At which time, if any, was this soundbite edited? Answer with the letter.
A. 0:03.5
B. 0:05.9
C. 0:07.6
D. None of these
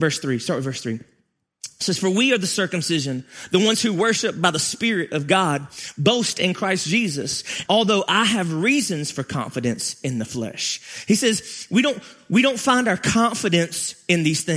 C